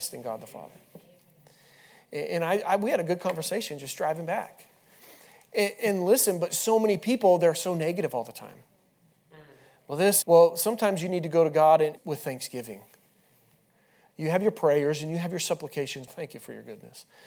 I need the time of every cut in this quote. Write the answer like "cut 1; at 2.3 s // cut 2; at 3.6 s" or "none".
cut 1; at 10.2 s // cut 2; at 12.0 s // cut 3; at 16.1 s

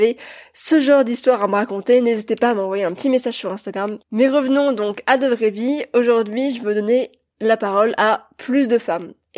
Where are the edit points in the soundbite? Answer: cut 1; at 4.0 s

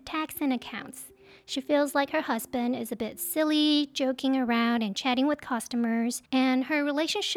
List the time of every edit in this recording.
cut 1; at 6.3 s

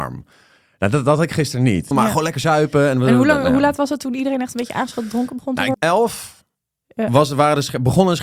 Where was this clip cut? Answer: cut 1; at 1.9 s // cut 2; at 5.7 s

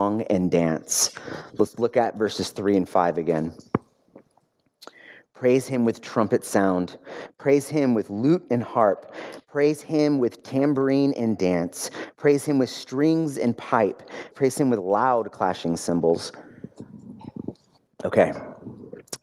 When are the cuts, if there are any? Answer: cut 1; at 14.3 s

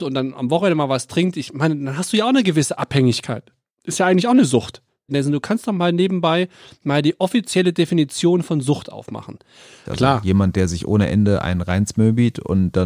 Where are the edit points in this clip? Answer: cut 1; at 5.1 s // cut 2; at 9.9 s

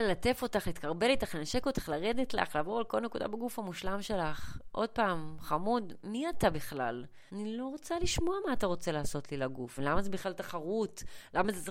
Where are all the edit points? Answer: cut 1; at 7.3 s // cut 2; at 9.8 s

